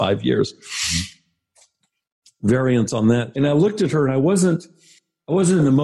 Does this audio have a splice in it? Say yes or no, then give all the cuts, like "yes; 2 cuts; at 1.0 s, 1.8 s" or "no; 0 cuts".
yes; 1 cut; at 3.3 s